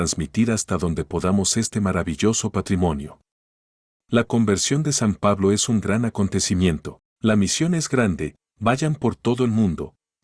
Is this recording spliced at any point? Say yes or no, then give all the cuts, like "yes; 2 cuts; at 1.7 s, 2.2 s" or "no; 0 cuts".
yes; 1 cut; at 7.2 s